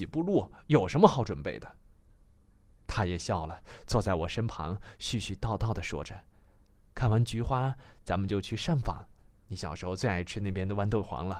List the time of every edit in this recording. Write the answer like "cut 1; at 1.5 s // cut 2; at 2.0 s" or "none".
none